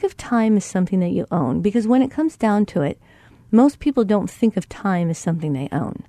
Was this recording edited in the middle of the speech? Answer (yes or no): no